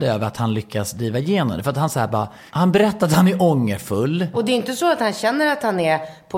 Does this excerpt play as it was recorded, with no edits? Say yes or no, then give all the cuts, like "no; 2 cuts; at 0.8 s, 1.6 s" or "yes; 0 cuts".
no; 2 cuts; at 2.5 s, 4.3 s